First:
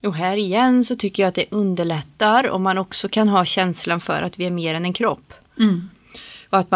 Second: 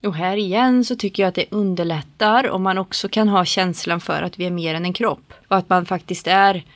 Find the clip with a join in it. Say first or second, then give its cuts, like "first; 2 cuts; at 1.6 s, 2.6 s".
second; 1 cut; at 5.4 s